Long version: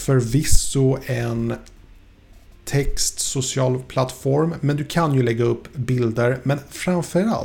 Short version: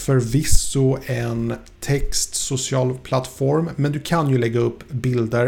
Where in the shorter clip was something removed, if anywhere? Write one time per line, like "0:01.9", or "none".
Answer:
0:01.8